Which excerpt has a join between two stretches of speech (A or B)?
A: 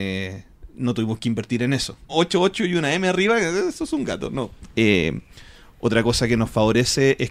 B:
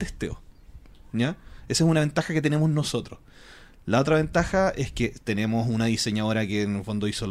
A